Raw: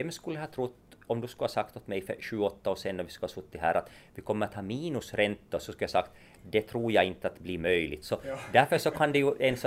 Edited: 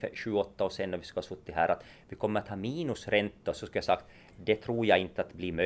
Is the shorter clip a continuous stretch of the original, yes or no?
yes